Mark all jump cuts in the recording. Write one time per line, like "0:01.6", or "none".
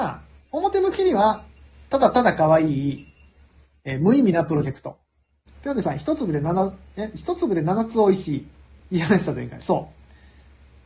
0:05.5